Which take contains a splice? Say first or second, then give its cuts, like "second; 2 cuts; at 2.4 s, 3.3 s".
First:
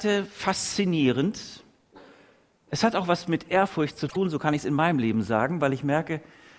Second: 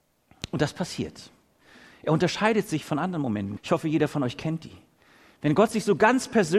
second; 2 cuts; at 1.9 s, 3.6 s